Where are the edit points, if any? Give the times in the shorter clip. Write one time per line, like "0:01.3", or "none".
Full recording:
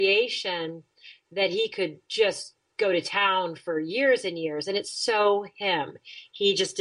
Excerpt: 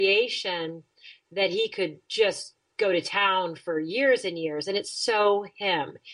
none